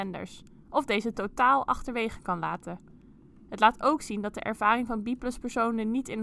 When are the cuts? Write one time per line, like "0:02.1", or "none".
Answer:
none